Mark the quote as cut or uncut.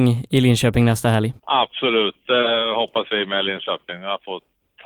cut